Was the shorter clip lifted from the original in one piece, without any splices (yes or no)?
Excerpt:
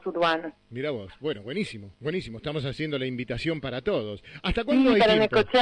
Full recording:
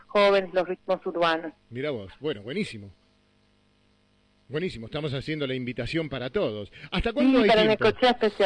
no